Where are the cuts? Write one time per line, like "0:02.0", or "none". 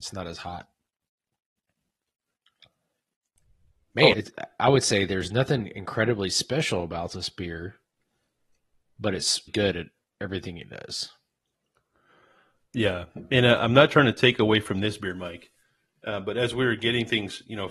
0:04.1
0:09.5